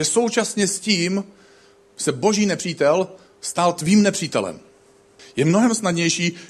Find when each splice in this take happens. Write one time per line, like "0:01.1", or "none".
0:05.2